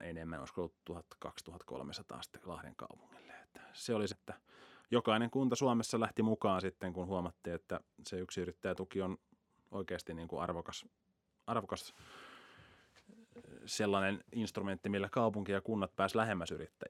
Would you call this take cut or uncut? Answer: cut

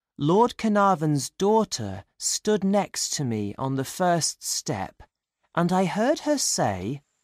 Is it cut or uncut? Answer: uncut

